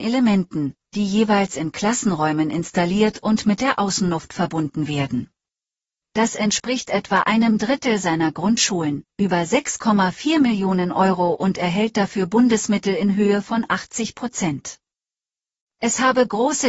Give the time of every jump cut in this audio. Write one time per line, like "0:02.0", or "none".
0:06.0